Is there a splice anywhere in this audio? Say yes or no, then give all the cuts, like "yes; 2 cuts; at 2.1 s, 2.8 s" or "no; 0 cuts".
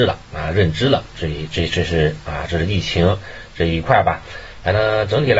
no; 0 cuts